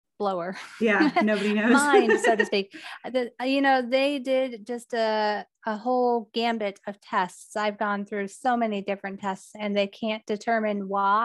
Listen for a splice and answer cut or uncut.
uncut